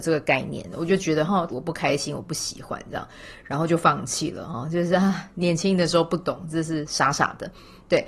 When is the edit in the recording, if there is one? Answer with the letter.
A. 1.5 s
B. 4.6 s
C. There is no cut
A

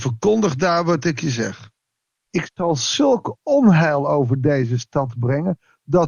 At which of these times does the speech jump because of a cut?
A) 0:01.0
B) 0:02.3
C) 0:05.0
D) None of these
B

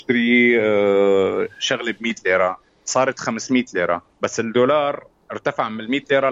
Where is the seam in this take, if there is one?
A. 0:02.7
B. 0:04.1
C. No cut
B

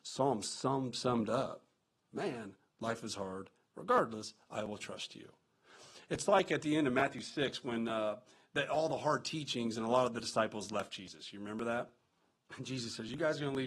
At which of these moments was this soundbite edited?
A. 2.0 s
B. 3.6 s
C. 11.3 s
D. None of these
A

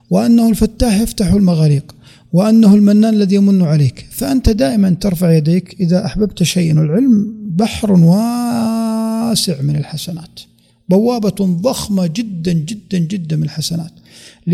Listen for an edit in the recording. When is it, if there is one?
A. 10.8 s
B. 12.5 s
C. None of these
C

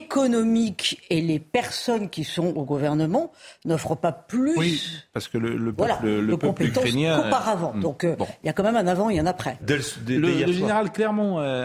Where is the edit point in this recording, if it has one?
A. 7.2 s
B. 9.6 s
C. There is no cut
B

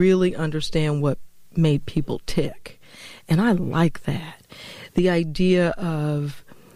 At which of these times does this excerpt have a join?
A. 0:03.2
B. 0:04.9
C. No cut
C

